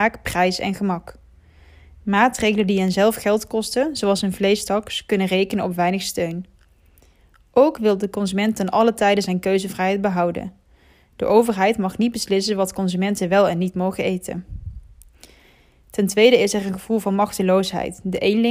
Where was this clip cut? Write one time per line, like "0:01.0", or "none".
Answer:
none